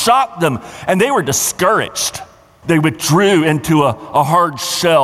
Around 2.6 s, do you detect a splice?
yes; 1 cut; at 2.6 s

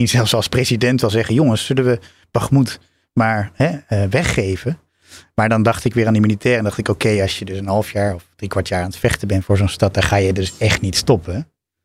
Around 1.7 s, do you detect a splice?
no; 0 cuts

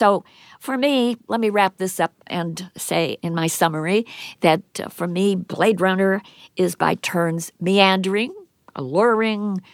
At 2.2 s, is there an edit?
yes; 1 cut; at 2.2 s

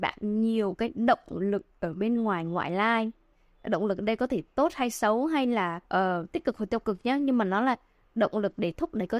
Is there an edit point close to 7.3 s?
no; 1 cut; at 5.8 s

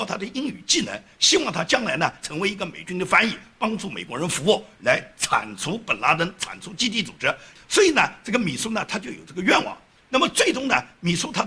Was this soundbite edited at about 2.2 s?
yes; 1 cut; at 2.2 s

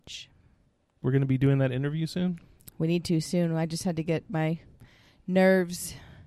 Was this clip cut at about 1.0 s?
yes; 1 cut; at 1.0 s

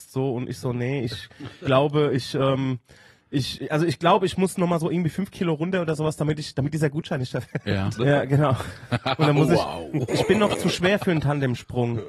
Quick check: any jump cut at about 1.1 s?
no; 2 cuts; at 8.0 s, 10.1 s

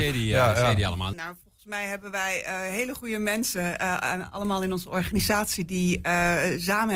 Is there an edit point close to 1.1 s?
yes; 1 cut; at 1.1 s

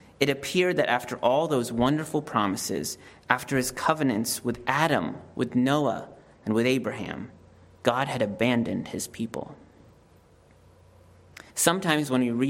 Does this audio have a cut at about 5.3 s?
no; 1 cut; at 11.5 s

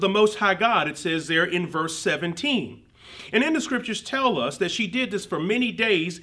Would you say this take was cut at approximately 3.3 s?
no; 0 cuts

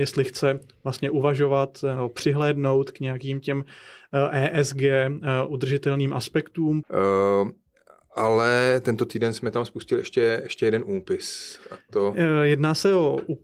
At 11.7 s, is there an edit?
no; 1 cut; at 6.8 s

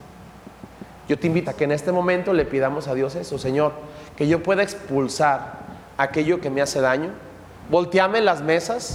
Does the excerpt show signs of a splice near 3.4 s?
no; 1 cut; at 1.4 s

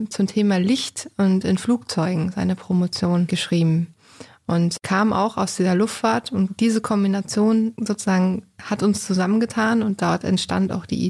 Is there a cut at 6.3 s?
no; 0 cuts

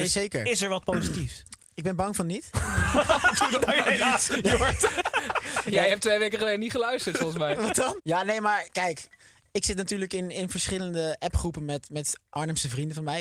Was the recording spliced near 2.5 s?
no; 1 cut; at 8.0 s

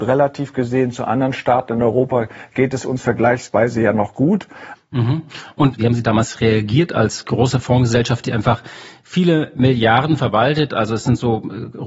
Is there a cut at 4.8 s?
yes; 1 cut; at 4.8 s

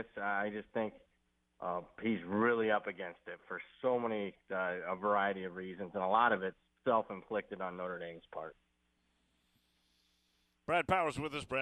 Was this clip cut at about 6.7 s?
yes; 1 cut; at 6.7 s

